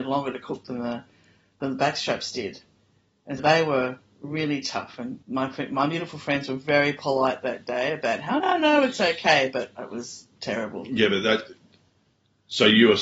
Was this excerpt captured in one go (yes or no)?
no